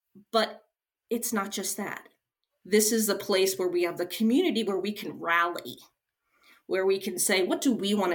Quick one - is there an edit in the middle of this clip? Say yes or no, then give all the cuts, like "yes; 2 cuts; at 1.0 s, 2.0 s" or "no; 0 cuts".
no; 0 cuts